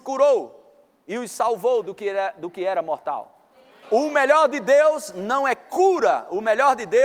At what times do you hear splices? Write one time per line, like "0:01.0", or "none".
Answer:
0:03.8